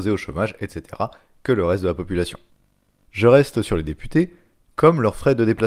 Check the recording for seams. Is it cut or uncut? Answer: cut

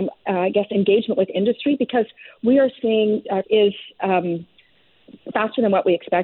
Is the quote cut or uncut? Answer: cut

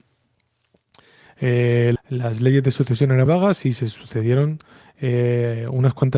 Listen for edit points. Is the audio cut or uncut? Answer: cut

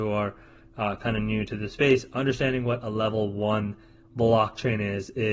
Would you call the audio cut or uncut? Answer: uncut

